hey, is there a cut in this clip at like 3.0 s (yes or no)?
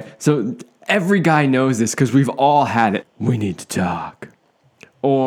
yes